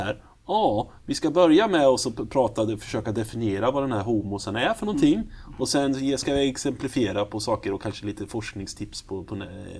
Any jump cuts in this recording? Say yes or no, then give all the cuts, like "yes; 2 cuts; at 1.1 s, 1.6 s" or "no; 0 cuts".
no; 0 cuts